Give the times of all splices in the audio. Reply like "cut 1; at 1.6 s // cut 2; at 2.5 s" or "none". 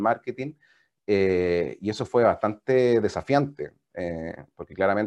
none